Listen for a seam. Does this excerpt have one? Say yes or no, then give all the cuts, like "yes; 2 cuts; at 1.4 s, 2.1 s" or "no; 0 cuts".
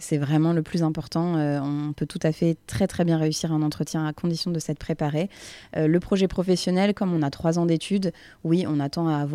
no; 0 cuts